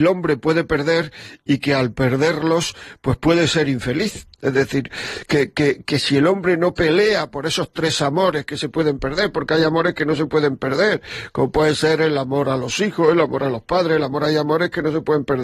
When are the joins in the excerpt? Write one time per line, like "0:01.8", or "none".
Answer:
0:04.3